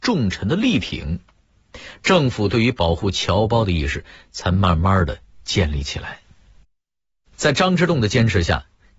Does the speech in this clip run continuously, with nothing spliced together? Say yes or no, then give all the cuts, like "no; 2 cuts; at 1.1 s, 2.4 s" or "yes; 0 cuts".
yes; 0 cuts